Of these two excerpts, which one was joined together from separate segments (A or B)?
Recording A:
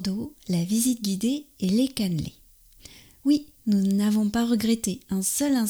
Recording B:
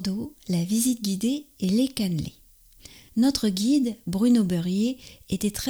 B